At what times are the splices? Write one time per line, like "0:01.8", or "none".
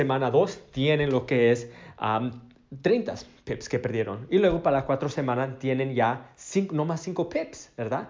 none